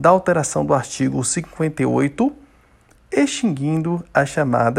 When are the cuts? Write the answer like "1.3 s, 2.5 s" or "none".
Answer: 3.0 s